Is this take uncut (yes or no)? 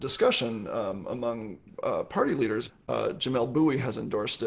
no